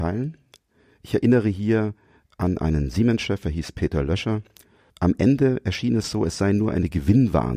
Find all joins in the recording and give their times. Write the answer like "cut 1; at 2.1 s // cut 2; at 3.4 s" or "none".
none